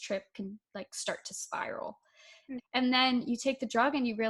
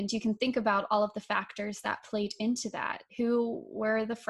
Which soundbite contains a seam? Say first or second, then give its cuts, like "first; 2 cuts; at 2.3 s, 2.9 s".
first; 1 cut; at 2.6 s